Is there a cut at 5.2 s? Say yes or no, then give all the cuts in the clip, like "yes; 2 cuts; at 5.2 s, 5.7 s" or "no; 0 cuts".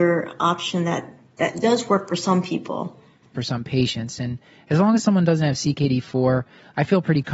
no; 1 cut; at 3.3 s